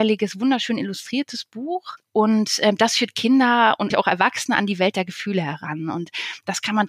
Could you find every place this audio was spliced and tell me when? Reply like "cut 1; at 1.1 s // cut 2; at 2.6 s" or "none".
cut 1; at 3.9 s